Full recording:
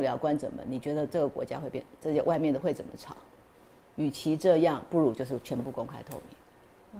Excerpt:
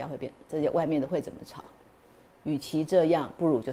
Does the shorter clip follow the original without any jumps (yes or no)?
yes